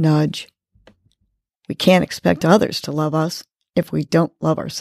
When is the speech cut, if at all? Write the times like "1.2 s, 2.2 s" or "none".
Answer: 1.6 s